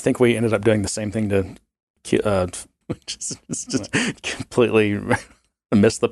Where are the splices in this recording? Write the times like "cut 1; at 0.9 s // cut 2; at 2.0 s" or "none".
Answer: cut 1; at 2.8 s